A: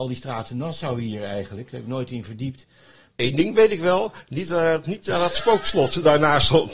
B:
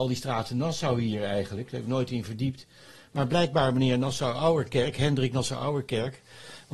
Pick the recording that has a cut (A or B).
A